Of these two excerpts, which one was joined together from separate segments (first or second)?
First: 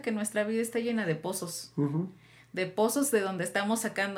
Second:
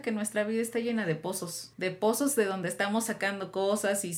second